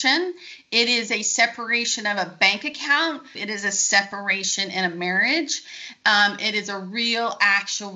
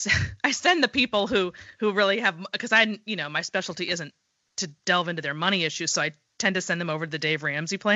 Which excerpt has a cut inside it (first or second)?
first